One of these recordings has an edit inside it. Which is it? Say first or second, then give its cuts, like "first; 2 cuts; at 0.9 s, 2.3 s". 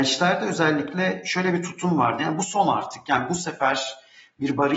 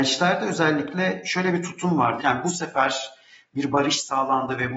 second; 1 cut; at 2.2 s